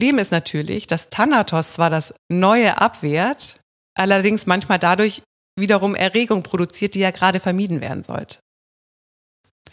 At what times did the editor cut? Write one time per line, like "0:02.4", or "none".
none